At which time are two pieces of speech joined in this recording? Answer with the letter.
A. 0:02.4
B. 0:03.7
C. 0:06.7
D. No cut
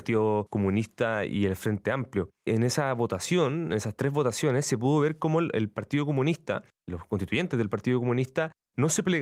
D